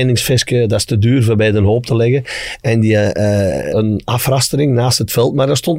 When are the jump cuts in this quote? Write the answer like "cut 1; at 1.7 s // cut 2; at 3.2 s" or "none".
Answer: cut 1; at 3.7 s